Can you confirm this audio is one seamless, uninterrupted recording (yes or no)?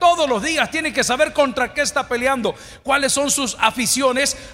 yes